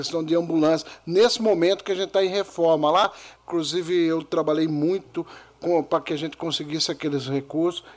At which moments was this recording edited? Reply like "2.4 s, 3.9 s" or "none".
3.4 s